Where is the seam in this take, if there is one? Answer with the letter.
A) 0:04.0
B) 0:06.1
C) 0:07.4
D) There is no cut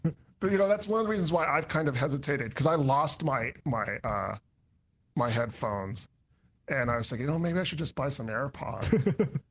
D